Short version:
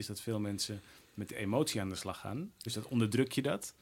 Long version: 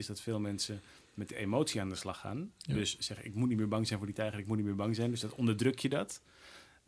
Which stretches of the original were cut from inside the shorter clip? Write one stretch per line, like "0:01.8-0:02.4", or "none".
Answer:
0:02.7-0:05.1